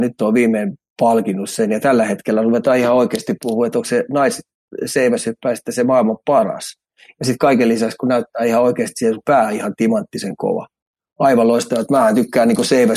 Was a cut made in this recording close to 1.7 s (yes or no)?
no